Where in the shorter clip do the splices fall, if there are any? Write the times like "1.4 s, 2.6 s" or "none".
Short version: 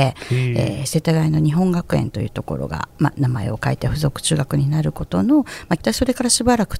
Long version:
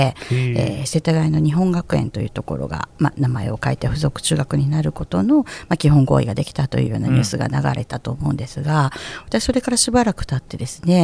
5.8 s